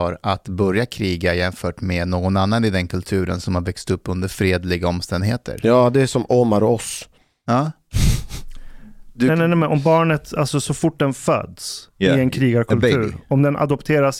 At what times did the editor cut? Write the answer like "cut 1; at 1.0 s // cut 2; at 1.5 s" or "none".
none